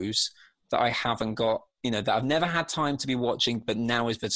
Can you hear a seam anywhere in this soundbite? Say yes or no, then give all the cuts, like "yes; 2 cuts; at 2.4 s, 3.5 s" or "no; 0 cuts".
no; 0 cuts